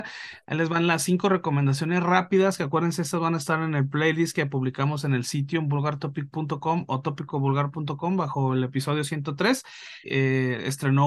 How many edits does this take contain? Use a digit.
1